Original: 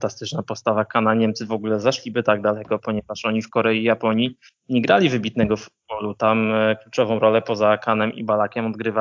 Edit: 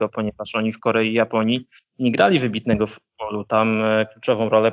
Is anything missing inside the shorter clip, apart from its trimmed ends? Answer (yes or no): no